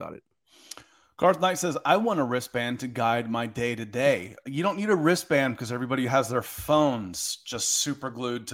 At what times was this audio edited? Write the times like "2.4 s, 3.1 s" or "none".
none